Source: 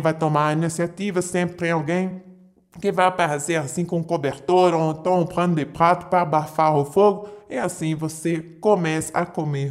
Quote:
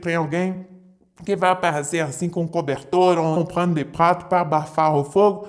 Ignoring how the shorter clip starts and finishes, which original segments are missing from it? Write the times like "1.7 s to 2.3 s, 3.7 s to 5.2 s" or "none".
4.9 s to 5.2 s